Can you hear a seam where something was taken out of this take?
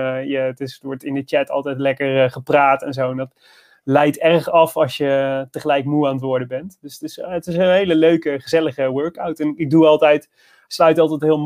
no; 0 cuts

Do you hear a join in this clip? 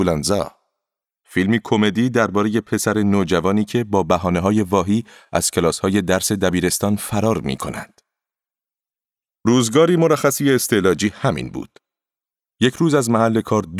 yes; 2 cuts; at 1.0 s, 9.3 s

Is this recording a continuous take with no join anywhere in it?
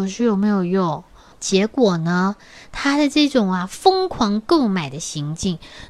no; 1 cut; at 1.3 s

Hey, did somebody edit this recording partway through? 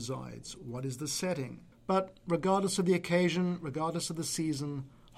yes; 1 cut; at 1.7 s

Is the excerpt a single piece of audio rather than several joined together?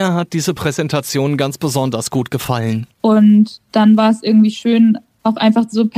no; 1 cut; at 2.9 s

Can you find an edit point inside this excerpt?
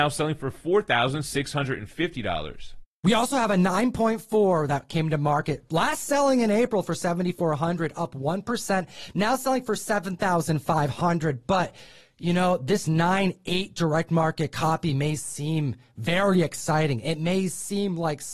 no; 0 cuts

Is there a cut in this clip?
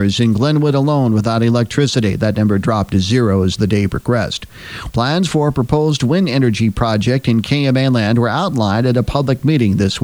yes; 1 cut; at 4.9 s

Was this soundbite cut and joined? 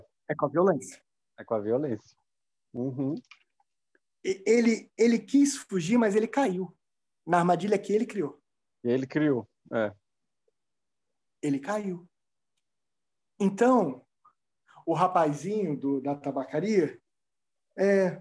yes; 1 cut; at 11.3 s

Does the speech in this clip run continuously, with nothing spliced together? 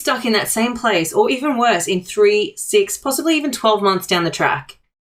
yes; 0 cuts

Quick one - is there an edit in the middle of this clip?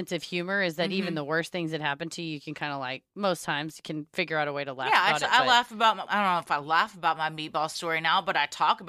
yes; 1 cut; at 6.1 s

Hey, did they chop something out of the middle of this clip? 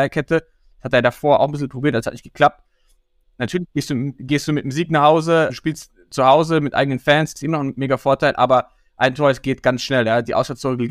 yes; 2 cuts; at 3.2 s, 5.5 s

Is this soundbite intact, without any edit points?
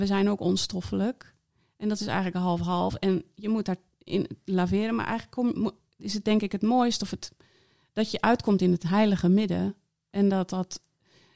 yes; 0 cuts

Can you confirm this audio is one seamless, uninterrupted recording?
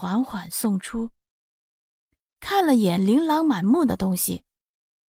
yes; 0 cuts

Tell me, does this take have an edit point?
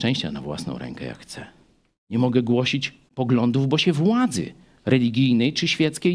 yes; 2 cuts; at 2.0 s, 3.1 s

